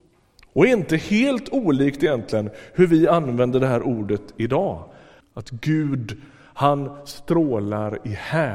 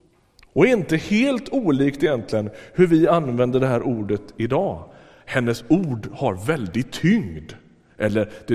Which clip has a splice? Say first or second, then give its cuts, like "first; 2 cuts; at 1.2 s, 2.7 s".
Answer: first; 1 cut; at 5.2 s